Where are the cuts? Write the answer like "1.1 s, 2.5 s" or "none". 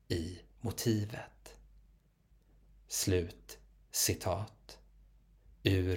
none